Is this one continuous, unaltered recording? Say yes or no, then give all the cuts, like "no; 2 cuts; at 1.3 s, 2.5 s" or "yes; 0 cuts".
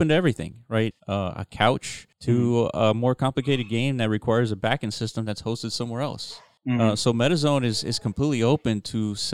no; 1 cut; at 0.9 s